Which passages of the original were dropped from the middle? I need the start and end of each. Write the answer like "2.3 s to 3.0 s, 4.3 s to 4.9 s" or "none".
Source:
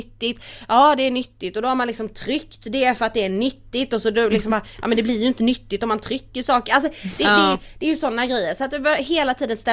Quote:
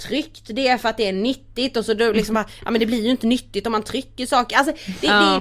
none